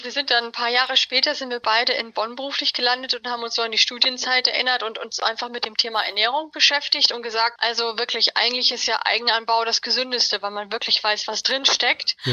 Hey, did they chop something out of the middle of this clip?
yes; 1 cut; at 7.6 s

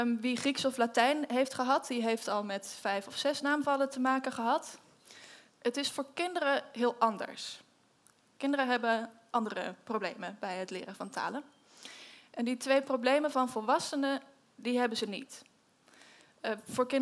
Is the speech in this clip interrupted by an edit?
yes; 1 cut; at 5.5 s

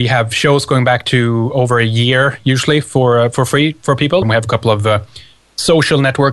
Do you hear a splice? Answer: yes; 1 cut; at 4.2 s

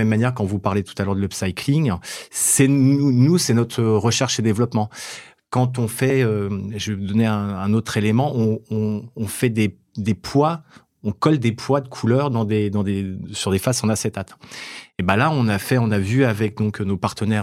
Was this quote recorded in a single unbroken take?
yes; 0 cuts

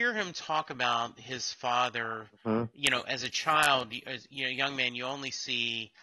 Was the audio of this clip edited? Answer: no; 0 cuts

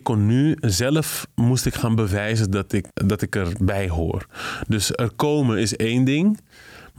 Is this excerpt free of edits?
no; 1 cut; at 2.9 s

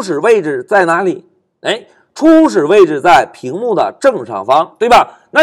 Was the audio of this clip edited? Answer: no; 0 cuts

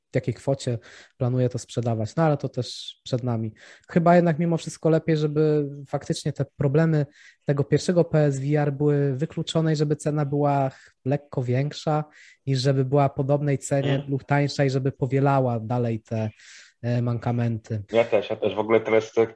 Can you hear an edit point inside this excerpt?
yes; 1 cut; at 17.9 s

